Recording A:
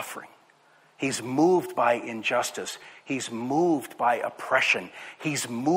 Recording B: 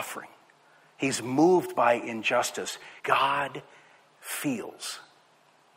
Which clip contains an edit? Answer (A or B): B